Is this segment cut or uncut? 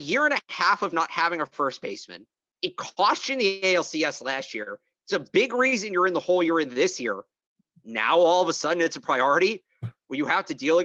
uncut